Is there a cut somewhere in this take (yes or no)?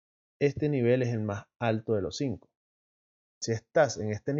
yes